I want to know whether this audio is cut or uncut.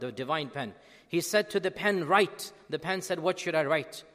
uncut